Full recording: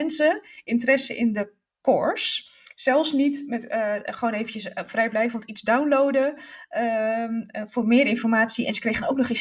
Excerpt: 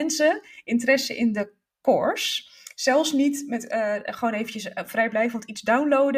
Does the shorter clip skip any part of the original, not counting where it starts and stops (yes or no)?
no